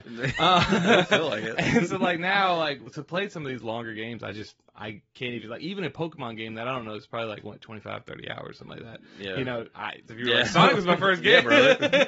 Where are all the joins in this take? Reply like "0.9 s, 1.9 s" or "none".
10.1 s